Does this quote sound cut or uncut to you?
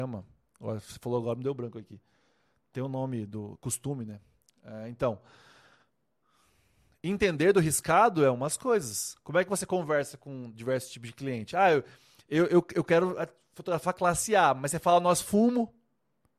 uncut